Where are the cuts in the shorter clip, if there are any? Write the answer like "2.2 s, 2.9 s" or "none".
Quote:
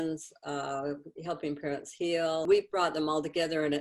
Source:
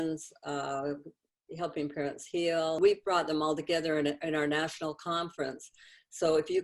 1.1 s

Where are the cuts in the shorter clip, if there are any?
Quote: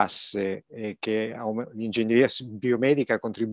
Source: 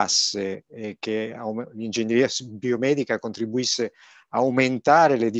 none

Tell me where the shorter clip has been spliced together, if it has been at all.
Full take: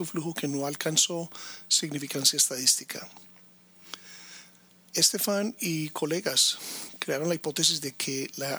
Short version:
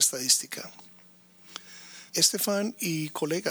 2.1 s

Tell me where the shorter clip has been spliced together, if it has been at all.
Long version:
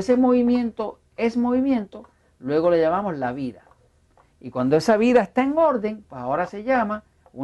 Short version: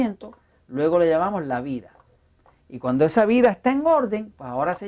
none

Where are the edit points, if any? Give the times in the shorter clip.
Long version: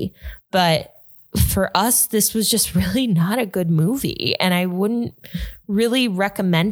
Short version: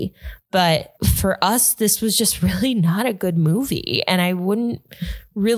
1.0 s

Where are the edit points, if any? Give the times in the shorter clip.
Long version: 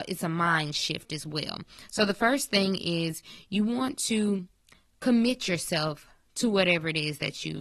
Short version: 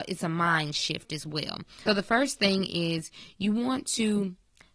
1.9 s

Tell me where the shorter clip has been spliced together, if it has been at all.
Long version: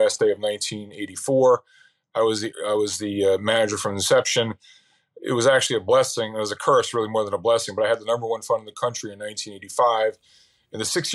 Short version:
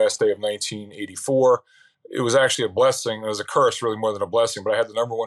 1.9 s

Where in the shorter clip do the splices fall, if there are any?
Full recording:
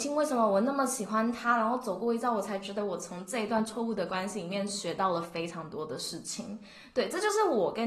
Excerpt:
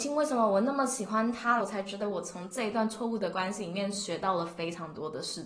1.6 s

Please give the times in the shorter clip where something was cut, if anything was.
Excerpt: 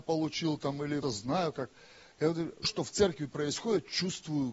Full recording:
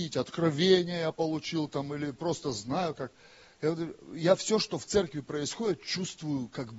1.0 s, 2.6 s

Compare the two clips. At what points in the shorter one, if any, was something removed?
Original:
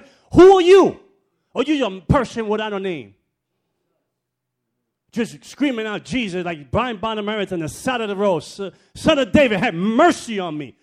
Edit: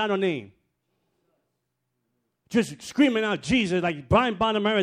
none

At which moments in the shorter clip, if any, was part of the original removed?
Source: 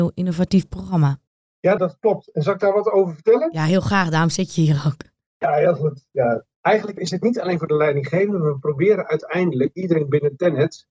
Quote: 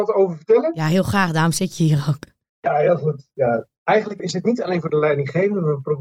none

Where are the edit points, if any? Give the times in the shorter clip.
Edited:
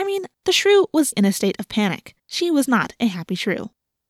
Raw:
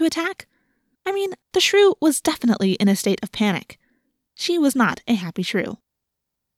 1.1 s, 2.2 s

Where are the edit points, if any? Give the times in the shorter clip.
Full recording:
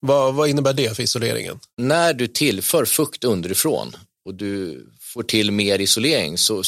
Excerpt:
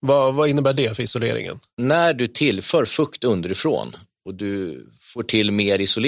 none

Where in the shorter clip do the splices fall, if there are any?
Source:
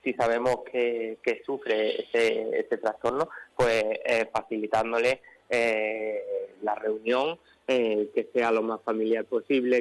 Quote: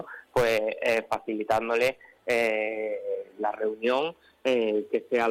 none

